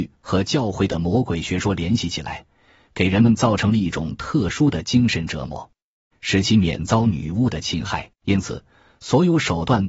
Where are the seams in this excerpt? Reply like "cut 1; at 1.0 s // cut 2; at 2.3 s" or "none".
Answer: cut 1; at 6.1 s // cut 2; at 8.1 s